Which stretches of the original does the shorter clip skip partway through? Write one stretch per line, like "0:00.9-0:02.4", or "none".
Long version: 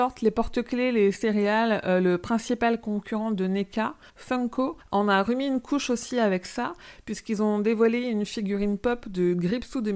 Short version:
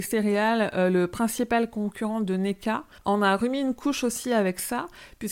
0:04.1-0:04.8